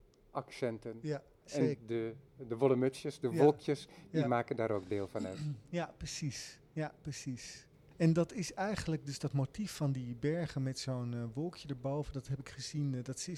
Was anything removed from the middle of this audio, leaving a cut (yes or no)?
no